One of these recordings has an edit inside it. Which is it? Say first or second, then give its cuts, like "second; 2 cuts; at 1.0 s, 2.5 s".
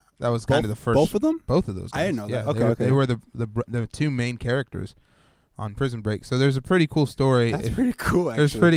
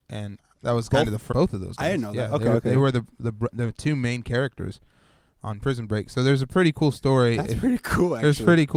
second; 1 cut; at 1.3 s